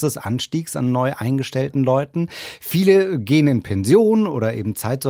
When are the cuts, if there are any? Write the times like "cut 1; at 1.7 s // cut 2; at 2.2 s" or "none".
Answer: none